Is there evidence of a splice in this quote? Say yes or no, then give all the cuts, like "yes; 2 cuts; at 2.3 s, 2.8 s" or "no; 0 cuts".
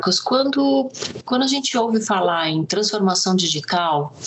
no; 0 cuts